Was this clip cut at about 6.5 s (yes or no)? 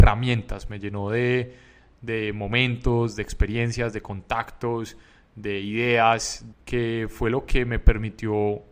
yes